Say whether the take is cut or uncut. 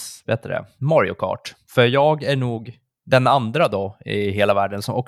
uncut